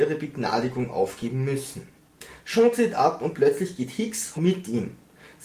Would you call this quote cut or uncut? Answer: cut